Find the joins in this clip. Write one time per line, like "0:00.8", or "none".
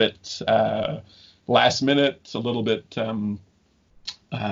none